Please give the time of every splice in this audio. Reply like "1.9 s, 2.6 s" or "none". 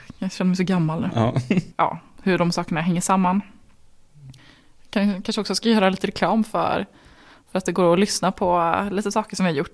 1.7 s